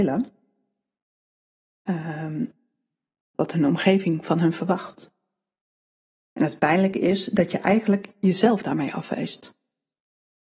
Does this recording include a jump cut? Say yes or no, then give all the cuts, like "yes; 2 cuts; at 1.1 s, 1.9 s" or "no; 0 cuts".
yes; 1 cut; at 3.3 s